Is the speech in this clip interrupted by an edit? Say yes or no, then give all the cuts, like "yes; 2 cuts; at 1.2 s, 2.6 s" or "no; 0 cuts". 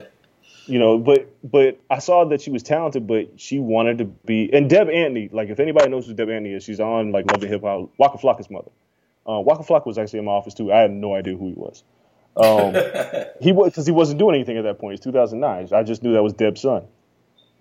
no; 0 cuts